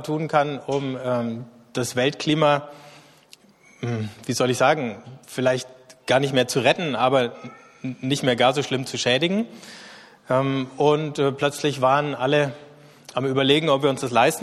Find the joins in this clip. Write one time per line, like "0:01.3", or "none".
none